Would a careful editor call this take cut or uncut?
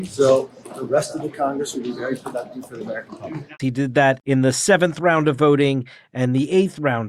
cut